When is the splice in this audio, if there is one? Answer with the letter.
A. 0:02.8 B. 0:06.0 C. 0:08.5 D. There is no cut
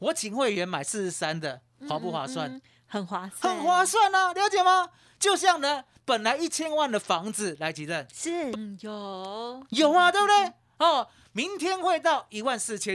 C